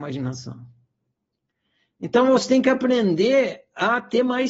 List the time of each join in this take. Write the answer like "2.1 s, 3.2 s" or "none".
none